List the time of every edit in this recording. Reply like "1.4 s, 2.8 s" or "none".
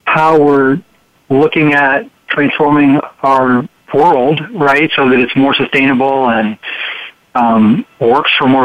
none